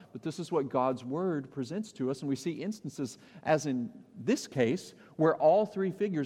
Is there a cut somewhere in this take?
no; 0 cuts

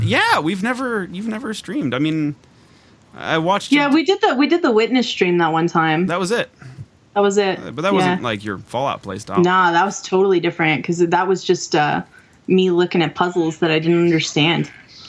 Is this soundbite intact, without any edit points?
yes; 0 cuts

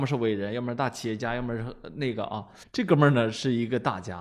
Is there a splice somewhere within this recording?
yes; 1 cut; at 2.6 s

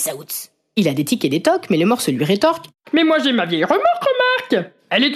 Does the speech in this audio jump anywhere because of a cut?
no; 0 cuts

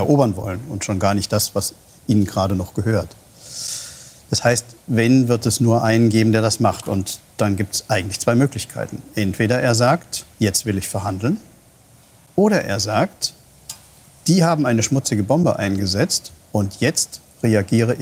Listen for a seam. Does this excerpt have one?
yes; 1 cut; at 10.3 s

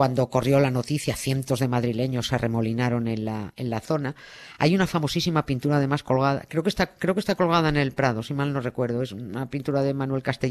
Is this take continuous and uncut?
yes; 0 cuts

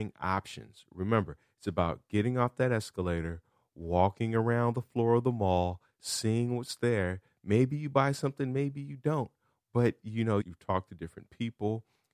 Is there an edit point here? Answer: yes; 1 cut; at 10.4 s

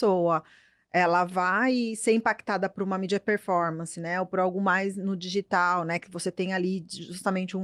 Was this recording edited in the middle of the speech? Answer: no; 0 cuts

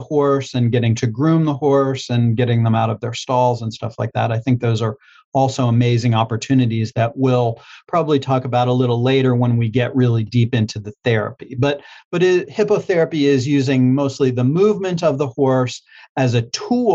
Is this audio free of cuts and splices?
yes; 0 cuts

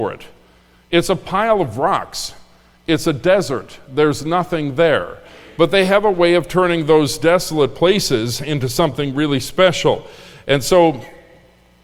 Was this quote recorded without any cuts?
yes; 0 cuts

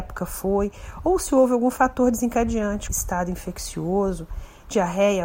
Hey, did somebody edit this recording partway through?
yes; 1 cut; at 2.9 s

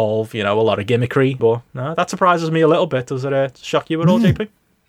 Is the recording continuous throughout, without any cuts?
no; 1 cut; at 1.4 s

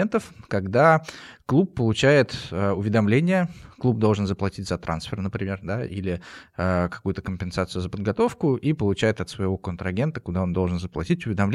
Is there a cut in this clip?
no; 0 cuts

